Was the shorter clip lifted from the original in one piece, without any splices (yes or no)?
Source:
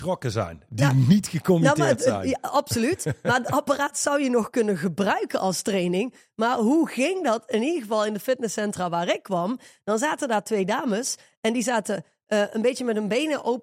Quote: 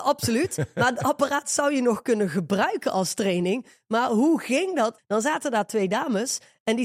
no